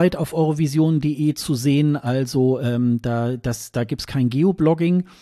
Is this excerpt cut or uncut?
uncut